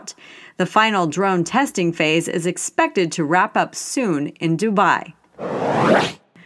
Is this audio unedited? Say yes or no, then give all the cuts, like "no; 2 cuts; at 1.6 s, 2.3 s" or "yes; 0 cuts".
yes; 0 cuts